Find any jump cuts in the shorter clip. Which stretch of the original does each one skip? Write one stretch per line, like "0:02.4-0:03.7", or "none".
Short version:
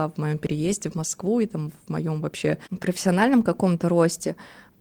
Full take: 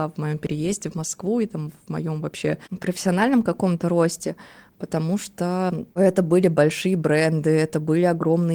none

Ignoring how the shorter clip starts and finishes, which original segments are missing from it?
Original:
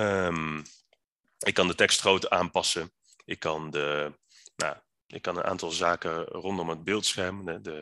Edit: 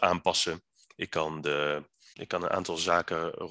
0:04.4-0:05.1

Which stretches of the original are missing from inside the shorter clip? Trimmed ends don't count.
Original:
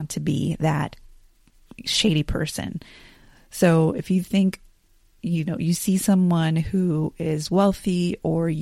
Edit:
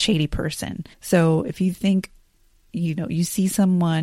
0:02.9-0:03.4

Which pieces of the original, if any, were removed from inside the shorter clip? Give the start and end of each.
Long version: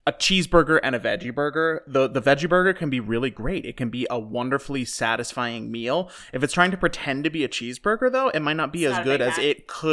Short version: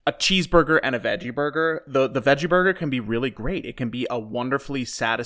none

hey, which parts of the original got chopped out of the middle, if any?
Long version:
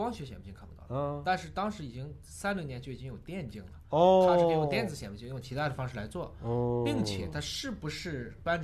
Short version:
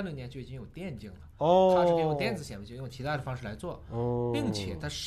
none

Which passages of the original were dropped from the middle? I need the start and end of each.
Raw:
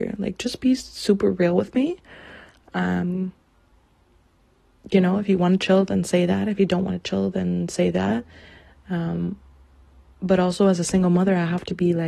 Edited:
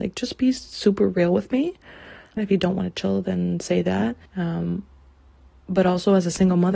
0:02.6-0:06.5
0:08.3-0:08.8

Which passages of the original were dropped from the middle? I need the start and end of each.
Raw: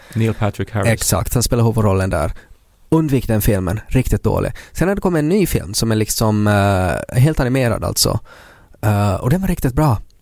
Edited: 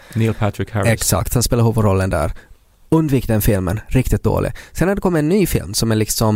none

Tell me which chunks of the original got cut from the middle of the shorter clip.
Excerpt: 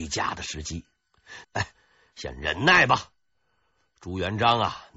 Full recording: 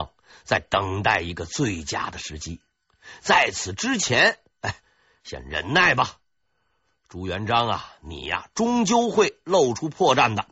0:03.2-0:04.5

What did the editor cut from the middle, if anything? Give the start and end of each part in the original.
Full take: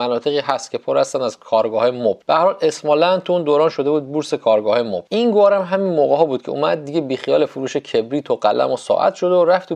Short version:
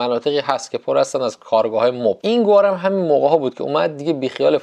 0:02.2-0:05.1

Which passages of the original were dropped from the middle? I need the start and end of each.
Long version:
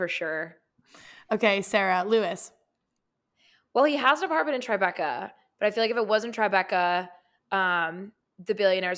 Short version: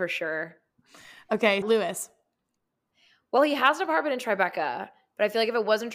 0:01.6-0:02.0

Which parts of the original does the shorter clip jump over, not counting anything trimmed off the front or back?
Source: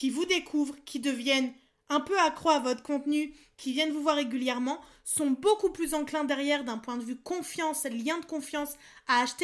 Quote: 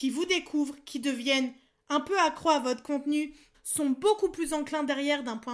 0:03.5-0:05.0

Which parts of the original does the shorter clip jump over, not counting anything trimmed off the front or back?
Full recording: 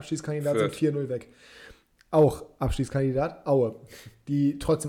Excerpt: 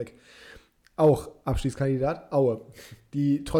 none

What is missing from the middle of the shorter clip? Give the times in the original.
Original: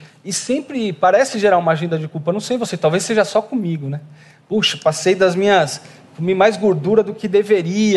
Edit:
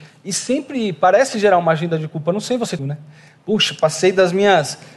0:02.8-0:03.8

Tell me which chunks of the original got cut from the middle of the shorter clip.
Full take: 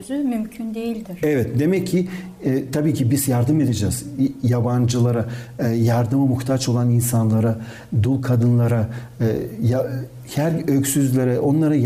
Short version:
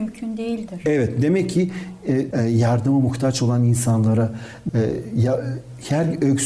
0:02.7-0:05.6
0:07.9-0:09.1

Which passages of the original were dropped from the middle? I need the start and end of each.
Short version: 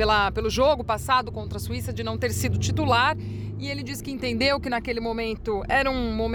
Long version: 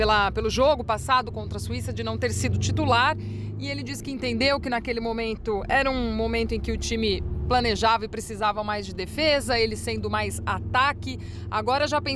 none

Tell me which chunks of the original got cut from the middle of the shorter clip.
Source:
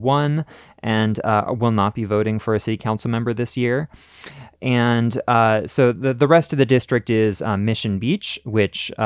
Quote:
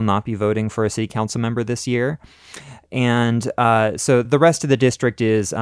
0:05.9-0:06.1

